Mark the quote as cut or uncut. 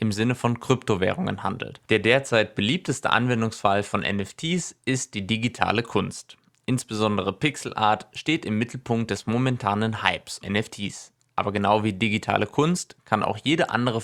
cut